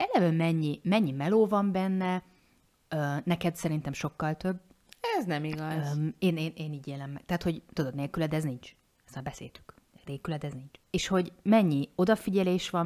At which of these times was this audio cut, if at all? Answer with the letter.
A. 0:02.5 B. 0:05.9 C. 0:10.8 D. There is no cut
C